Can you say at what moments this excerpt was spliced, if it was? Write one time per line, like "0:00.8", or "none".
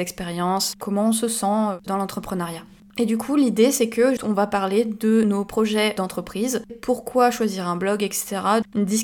0:02.8
0:04.2
0:06.7